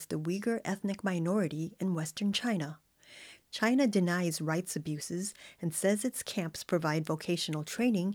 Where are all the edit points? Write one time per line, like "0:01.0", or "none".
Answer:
0:03.4